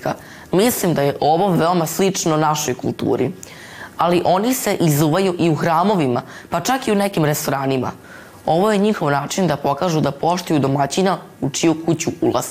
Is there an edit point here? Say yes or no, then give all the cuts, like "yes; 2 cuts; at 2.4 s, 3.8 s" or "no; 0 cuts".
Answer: no; 0 cuts